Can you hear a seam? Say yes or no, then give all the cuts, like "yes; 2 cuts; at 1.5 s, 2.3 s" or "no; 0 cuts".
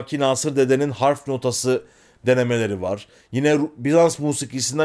no; 0 cuts